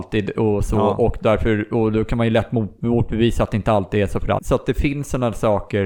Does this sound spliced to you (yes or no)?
yes